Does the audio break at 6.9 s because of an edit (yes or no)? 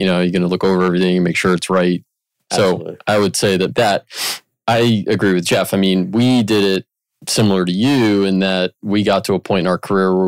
no